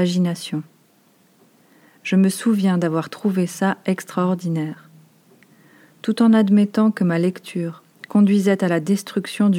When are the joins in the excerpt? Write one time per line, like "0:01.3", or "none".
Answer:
none